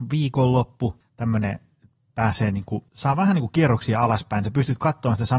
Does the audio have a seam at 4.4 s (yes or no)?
no